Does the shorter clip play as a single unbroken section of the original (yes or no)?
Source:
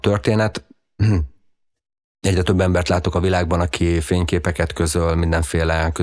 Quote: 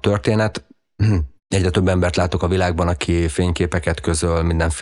no